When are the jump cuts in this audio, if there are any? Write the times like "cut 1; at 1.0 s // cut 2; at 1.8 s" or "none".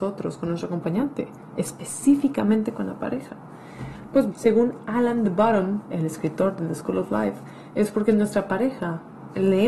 cut 1; at 4.3 s